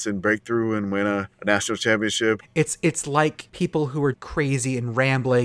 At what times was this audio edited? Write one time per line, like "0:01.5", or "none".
0:02.4
0:04.1